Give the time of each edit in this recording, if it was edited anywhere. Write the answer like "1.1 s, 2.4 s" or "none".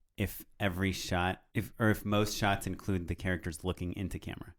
1.5 s